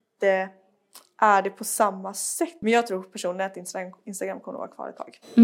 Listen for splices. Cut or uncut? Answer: cut